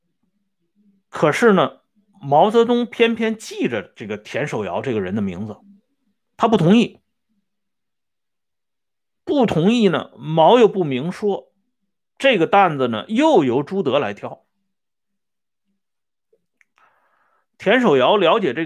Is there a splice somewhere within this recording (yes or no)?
no